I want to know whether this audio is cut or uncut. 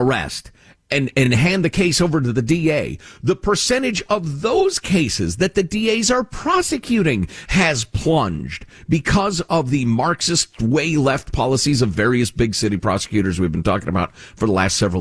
uncut